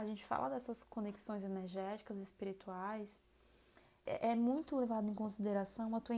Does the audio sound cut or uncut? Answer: cut